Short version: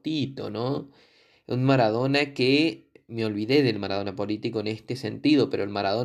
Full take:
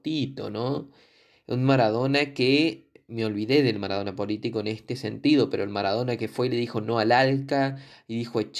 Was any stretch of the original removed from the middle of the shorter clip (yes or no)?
no